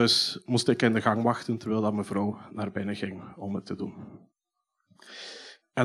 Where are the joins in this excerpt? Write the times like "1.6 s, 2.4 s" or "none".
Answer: none